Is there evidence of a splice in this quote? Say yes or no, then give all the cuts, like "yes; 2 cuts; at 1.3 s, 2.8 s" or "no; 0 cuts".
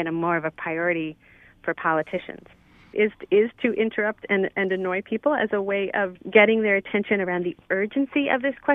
yes; 2 cuts; at 2.9 s, 6.2 s